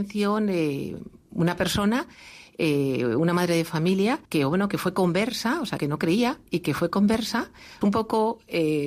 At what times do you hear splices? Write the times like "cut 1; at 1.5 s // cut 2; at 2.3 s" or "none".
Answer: cut 1; at 4.2 s // cut 2; at 5.8 s // cut 3; at 7.8 s